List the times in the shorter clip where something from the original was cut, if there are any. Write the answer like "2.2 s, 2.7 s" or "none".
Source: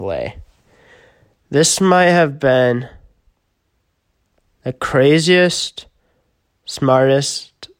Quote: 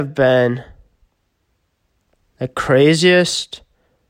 none